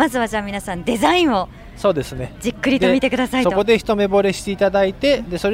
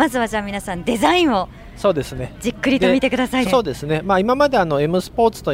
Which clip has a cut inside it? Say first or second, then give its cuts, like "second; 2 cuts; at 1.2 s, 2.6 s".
second; 1 cut; at 3.4 s